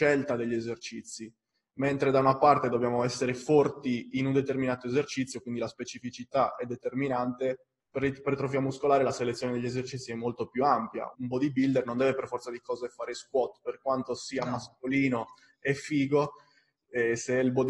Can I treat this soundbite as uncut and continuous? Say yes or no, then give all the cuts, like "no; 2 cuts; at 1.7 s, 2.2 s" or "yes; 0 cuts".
no; 1 cut; at 11.1 s